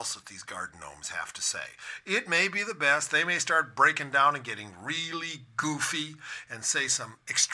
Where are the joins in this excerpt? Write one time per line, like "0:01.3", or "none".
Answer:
none